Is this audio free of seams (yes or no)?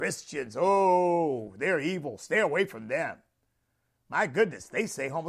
yes